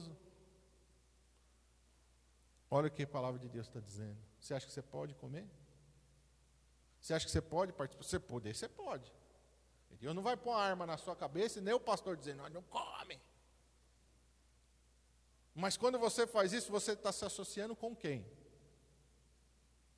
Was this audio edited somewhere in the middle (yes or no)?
no